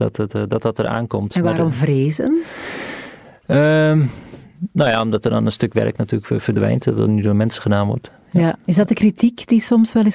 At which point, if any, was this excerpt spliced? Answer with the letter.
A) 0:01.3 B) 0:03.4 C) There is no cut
C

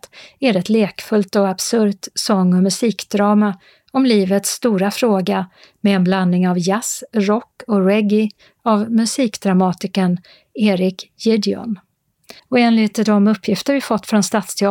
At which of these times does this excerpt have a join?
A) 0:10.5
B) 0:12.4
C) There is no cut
B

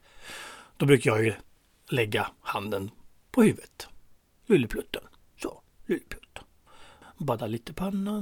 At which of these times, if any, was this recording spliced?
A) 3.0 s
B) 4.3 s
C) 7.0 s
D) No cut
C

